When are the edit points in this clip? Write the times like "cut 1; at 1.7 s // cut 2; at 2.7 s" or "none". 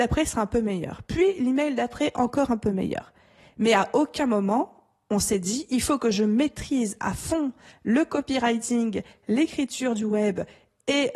none